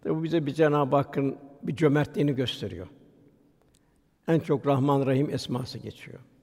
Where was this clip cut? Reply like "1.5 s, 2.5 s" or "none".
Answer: none